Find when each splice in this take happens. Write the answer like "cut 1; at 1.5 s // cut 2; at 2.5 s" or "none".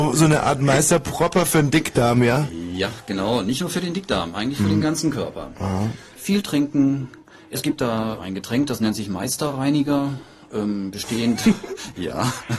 cut 1; at 6.2 s // cut 2; at 8.2 s